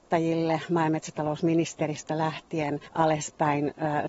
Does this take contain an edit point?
yes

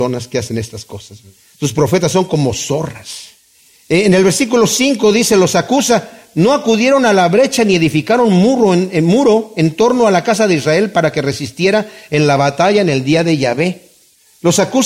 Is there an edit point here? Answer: no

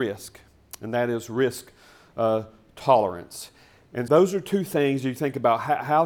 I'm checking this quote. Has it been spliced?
yes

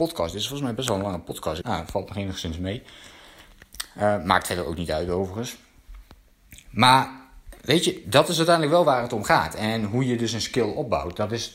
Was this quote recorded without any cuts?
no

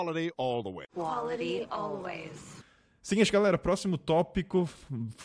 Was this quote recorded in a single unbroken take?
yes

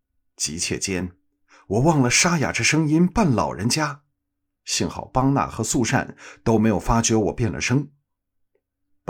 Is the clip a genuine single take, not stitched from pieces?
no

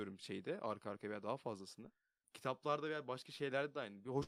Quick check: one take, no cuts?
no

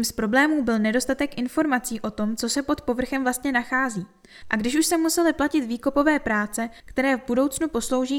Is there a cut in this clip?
yes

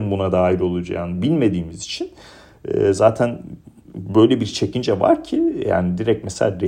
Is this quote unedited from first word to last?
yes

